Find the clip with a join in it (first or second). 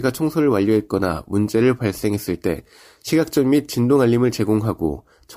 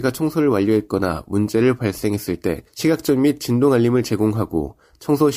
second